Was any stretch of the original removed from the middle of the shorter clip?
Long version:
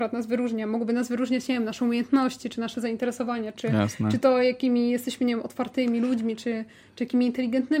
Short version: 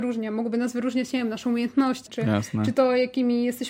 yes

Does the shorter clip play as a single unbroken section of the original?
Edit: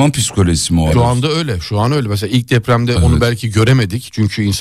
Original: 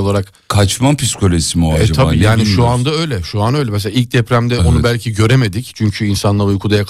no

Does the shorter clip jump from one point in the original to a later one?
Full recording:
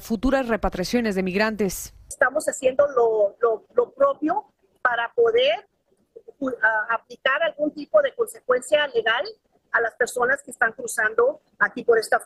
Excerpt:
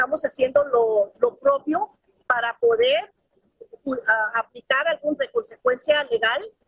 yes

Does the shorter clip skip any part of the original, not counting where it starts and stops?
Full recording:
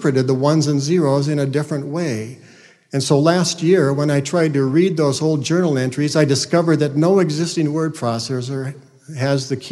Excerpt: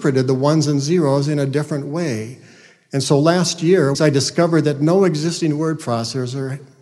yes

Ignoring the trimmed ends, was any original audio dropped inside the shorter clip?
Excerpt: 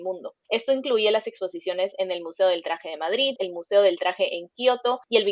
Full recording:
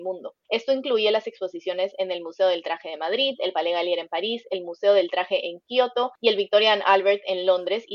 yes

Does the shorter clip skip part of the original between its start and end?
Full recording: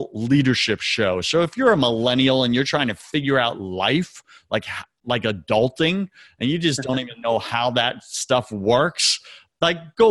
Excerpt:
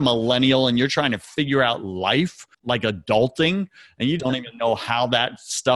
yes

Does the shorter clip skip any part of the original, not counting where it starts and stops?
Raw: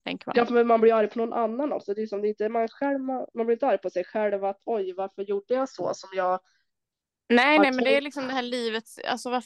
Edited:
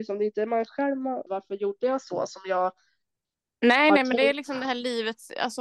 yes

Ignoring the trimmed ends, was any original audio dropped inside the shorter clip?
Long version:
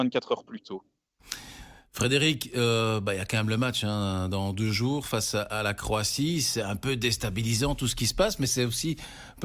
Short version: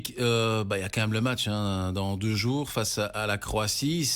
no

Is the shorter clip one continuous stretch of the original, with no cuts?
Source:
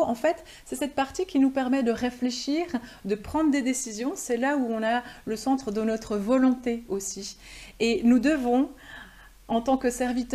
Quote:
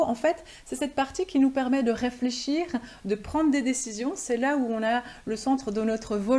yes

